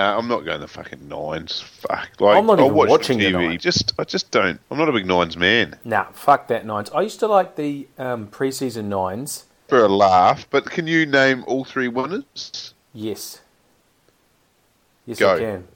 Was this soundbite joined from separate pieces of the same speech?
yes; 3 cuts; at 3.6 s, 4.6 s, 9.7 s

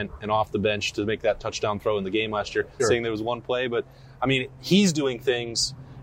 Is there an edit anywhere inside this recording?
yes; 1 cut; at 2.8 s

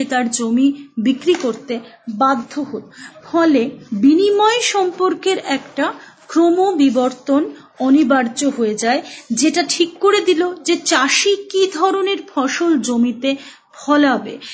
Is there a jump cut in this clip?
no; 0 cuts

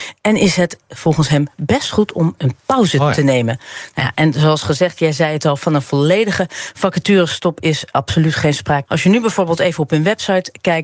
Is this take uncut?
no; 2 cuts; at 2.4 s, 8.9 s

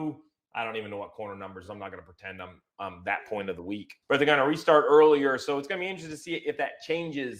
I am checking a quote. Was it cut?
no; 0 cuts

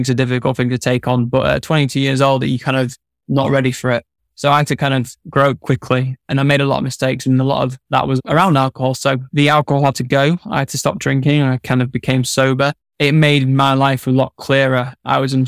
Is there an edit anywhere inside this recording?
no; 0 cuts

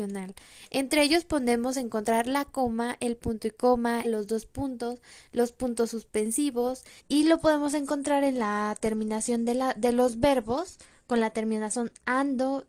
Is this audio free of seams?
no; 2 cuts; at 4.0 s, 7.0 s

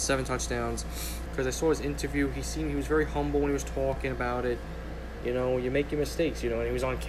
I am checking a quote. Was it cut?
yes; 1 cut; at 1.2 s

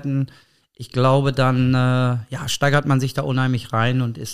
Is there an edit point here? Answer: no; 0 cuts

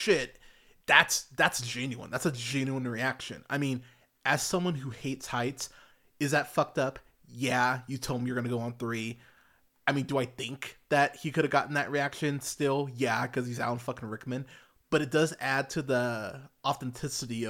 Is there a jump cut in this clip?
no; 0 cuts

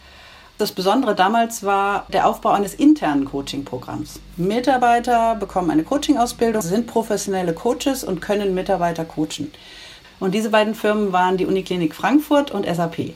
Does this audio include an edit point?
yes; 2 cuts; at 6.6 s, 10.0 s

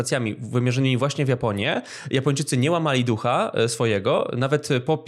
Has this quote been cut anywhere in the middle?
no; 0 cuts

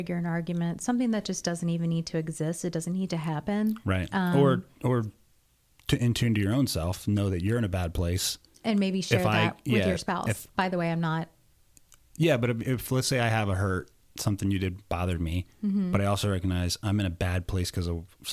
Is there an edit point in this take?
no; 0 cuts

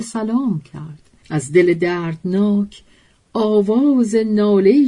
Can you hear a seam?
yes; 1 cut; at 1.2 s

